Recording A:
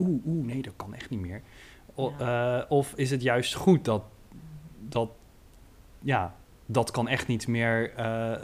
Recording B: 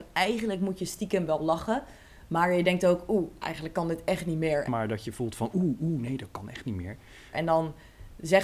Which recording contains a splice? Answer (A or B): B